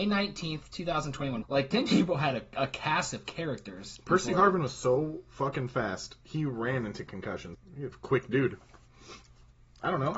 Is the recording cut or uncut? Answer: cut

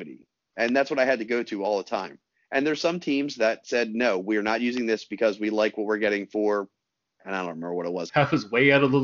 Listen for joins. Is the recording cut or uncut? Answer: cut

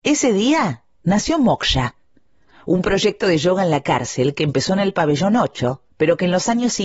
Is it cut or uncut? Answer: uncut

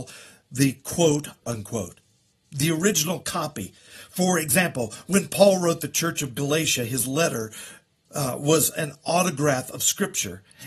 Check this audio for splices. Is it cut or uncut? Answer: cut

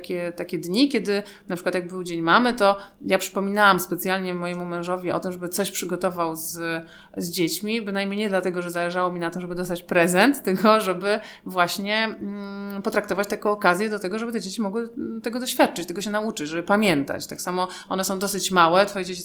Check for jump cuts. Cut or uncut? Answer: uncut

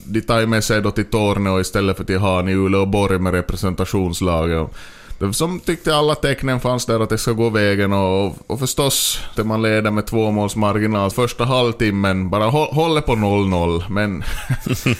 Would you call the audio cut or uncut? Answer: cut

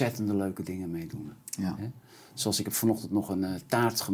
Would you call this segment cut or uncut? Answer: uncut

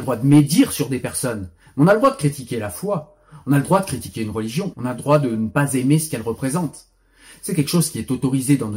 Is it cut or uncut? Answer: cut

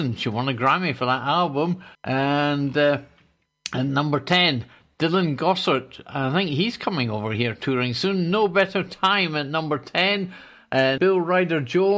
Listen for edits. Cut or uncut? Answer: cut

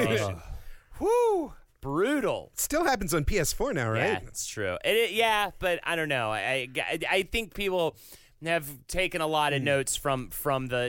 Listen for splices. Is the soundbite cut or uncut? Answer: uncut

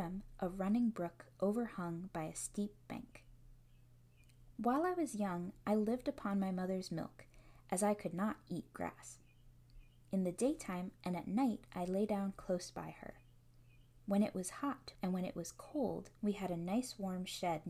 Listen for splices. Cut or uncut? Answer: cut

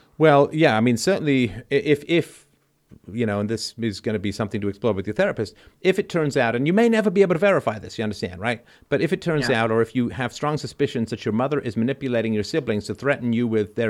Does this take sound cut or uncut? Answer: uncut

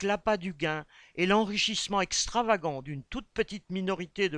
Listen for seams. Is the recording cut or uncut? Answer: uncut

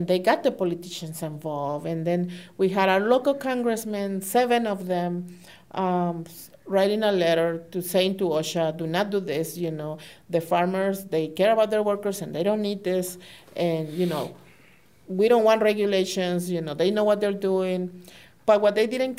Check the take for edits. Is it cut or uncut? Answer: uncut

